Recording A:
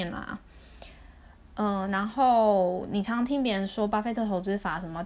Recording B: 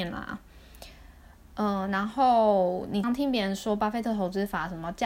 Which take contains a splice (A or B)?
B